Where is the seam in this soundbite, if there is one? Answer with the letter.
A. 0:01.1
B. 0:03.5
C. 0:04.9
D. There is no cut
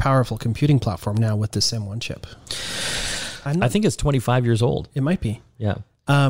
B